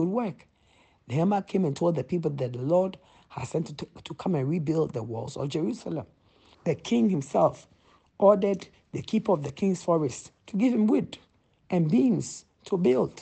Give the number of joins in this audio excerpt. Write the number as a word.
two